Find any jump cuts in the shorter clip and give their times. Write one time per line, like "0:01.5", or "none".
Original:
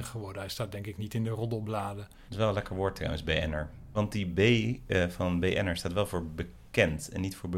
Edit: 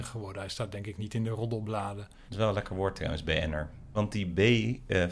none